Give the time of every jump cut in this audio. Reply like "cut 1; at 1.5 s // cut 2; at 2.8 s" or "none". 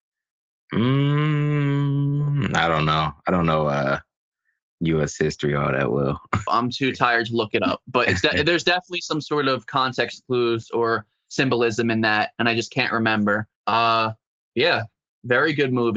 cut 1; at 6.5 s // cut 2; at 13.6 s